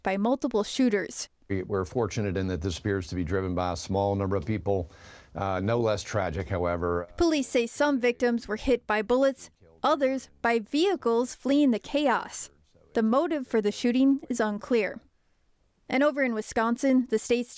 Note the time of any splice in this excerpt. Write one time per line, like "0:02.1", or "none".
0:01.4